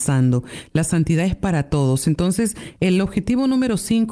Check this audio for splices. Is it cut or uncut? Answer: uncut